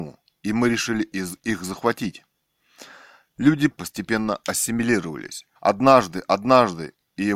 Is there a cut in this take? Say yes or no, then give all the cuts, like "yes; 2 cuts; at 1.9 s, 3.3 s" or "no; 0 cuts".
yes; 2 cuts; at 3.7 s, 5.6 s